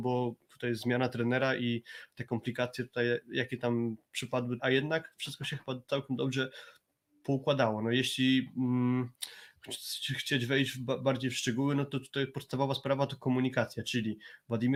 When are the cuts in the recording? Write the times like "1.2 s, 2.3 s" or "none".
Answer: 4.6 s